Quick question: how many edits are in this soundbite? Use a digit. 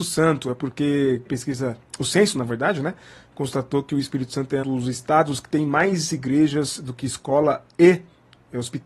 2